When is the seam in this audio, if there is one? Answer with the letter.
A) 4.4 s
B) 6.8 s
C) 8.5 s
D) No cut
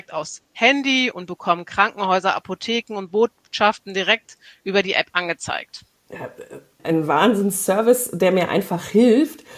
B